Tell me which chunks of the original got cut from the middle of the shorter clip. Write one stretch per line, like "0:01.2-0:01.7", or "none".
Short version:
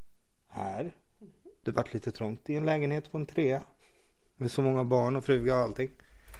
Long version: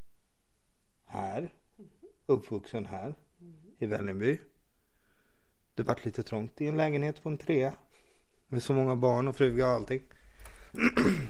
0:02.2-0:05.8